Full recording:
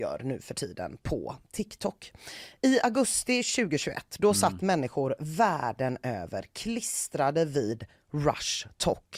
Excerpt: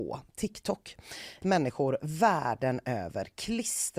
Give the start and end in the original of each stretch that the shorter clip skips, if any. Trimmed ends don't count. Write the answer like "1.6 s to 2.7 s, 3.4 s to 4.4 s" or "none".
2.6 s to 4.6 s